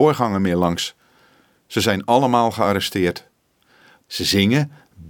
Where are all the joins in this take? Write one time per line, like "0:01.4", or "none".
0:04.0

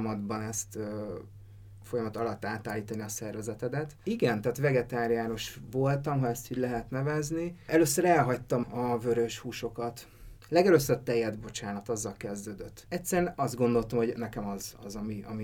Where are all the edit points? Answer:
0:08.6

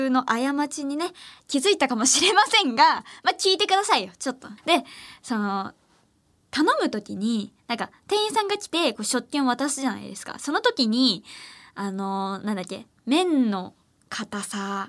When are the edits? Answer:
0:04.6

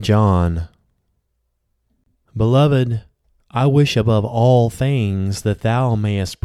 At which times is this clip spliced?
0:02.1

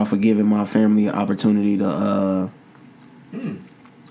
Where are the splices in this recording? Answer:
none

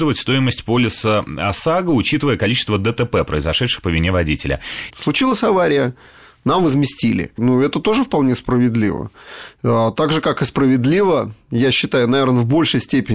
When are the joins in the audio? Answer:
0:04.9
0:07.4

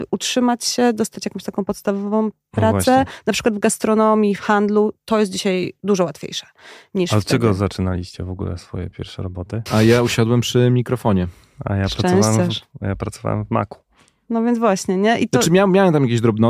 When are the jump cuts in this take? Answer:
0:09.7

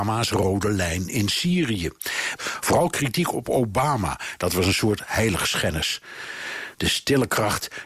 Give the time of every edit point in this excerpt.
0:02.4
0:06.7

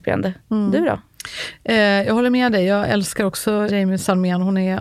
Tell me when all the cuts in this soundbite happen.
0:03.7

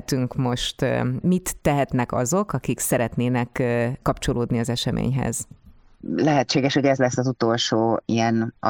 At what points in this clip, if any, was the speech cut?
none

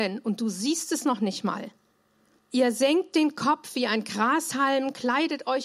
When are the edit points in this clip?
0:02.4

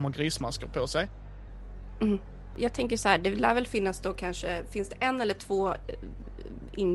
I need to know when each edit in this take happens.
none

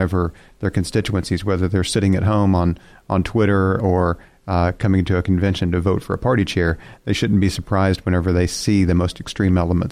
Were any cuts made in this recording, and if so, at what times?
0:03.8

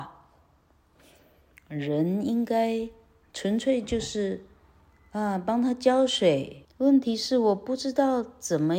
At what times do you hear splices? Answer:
0:06.6

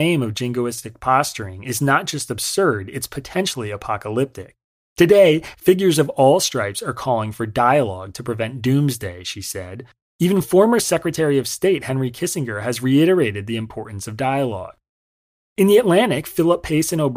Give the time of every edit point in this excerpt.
0:05.5
0:10.0

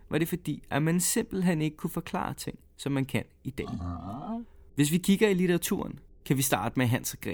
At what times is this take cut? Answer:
0:04.7

